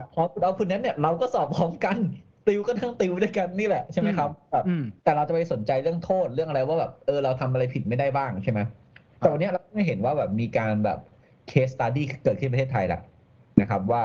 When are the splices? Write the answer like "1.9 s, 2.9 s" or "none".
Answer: 5.0 s